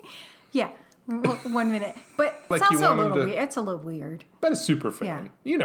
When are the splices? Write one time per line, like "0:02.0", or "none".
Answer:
0:02.5